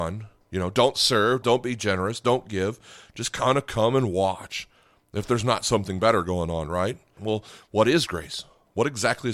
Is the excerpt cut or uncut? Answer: cut